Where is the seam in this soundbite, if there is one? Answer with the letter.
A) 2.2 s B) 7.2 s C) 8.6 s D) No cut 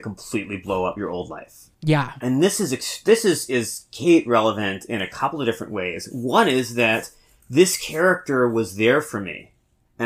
A